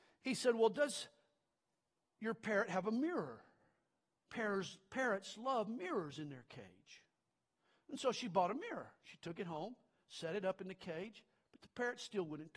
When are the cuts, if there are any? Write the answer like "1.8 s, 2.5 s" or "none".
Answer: none